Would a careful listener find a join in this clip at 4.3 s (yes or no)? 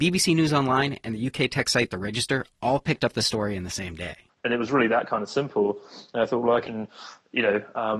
yes